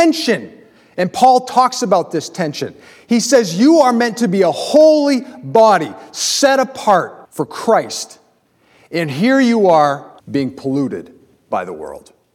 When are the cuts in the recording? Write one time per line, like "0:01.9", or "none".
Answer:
0:07.2
0:10.2